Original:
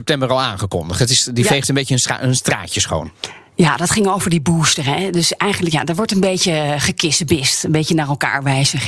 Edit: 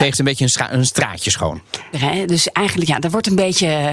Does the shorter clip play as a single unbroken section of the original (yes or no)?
no